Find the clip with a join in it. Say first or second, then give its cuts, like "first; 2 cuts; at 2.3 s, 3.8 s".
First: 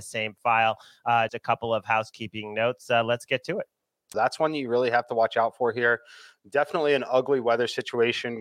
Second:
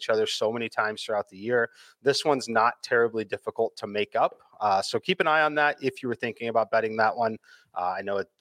first; 2 cuts; at 1.3 s, 4.1 s